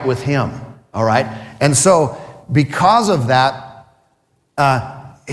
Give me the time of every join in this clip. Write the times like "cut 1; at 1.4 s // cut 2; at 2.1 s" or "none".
none